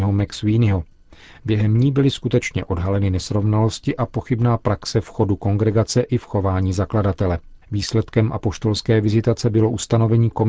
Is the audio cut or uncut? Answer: cut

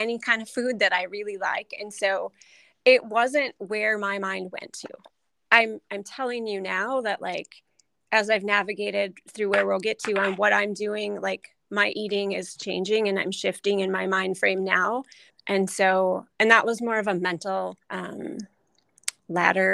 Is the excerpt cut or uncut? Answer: cut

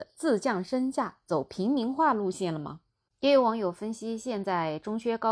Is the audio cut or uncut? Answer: uncut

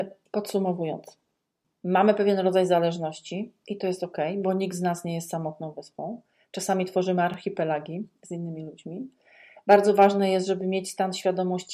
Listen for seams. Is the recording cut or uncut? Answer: uncut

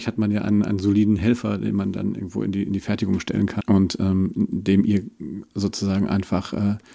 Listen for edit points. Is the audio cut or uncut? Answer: cut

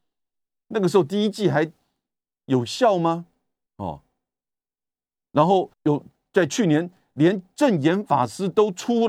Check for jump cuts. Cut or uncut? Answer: cut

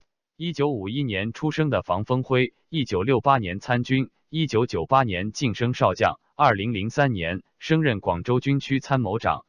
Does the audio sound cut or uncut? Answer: uncut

